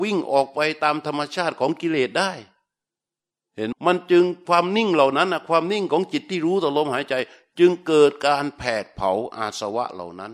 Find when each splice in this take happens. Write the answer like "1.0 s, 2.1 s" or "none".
3.7 s